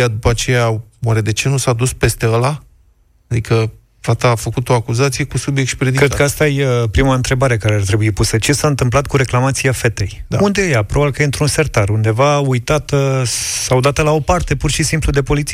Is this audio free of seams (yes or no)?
yes